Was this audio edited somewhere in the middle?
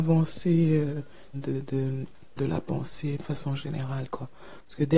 yes; 2 cuts; at 1.3 s, 2.4 s

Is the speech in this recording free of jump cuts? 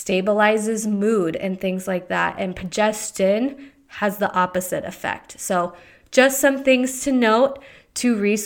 yes; 0 cuts

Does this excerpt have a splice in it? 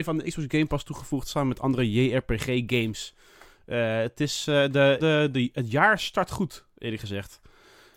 yes; 1 cut; at 5.0 s

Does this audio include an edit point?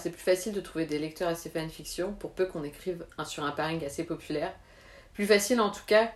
no; 0 cuts

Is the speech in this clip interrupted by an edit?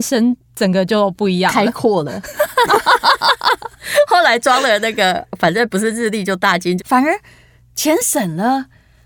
yes; 2 cuts; at 2.7 s, 6.8 s

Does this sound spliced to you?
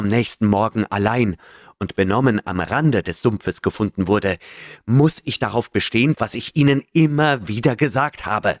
yes; 1 cut; at 6.1 s

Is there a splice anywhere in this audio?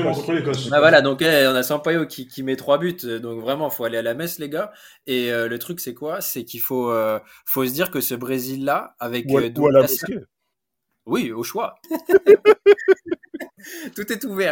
yes; 1 cut; at 11.8 s

